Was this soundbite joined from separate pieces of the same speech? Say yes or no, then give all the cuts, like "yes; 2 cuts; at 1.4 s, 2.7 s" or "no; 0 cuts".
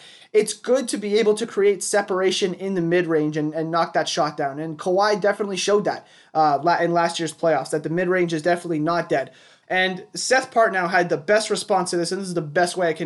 yes; 1 cut; at 9.6 s